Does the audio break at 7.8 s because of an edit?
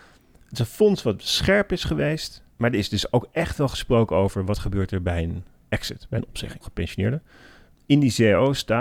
no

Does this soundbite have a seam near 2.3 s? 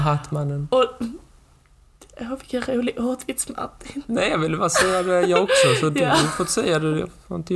no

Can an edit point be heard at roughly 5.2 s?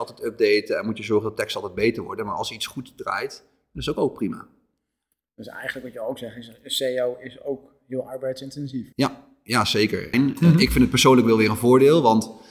no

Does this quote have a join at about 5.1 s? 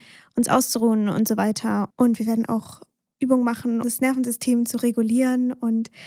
no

